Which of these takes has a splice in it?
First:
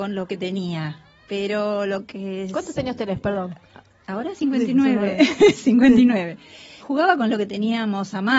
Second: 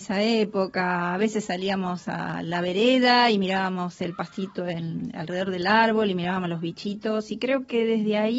first; 1 cut; at 6.8 s

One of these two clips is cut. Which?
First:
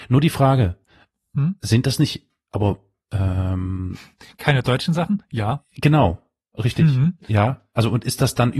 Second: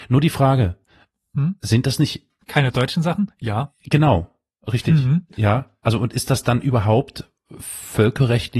second; 1 cut; at 2.4 s

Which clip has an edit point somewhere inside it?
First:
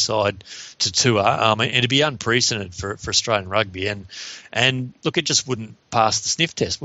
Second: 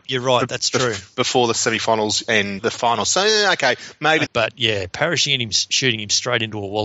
second; 2 cuts; at 2.6 s, 4.3 s

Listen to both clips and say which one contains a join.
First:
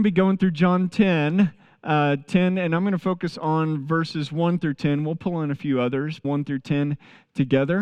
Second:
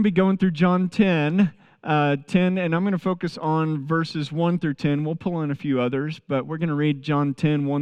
first; 1 cut; at 6.2 s

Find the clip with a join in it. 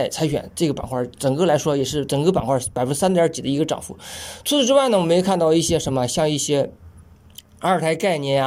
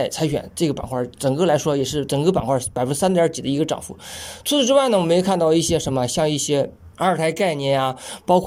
second; 1 cut; at 6.9 s

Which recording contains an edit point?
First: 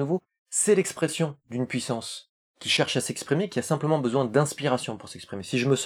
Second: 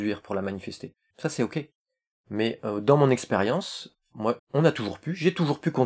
second; 2 cuts; at 1.1 s, 4.4 s

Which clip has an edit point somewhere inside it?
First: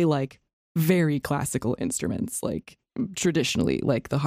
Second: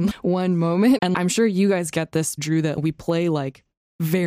second; 2 cuts; at 1.0 s, 2.4 s

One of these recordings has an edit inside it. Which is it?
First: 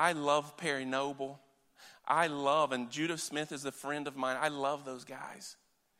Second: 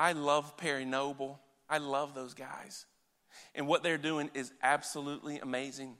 second; 1 cut; at 1.7 s

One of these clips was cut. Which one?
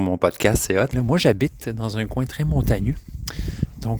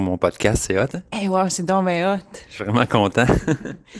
first; 1 cut; at 0.9 s

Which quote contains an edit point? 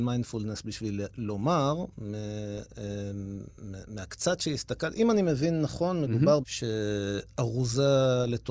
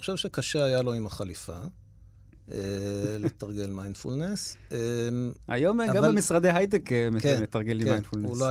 first; 1 cut; at 6.4 s

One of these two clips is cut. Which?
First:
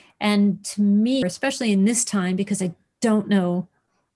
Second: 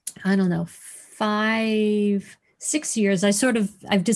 first; 1 cut; at 1.2 s

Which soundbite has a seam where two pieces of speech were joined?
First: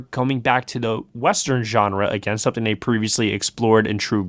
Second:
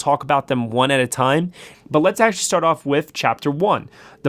second; 1 cut; at 1.7 s

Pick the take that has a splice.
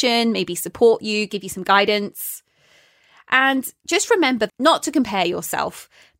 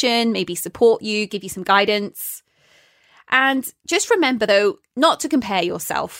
first; 1 cut; at 4.5 s

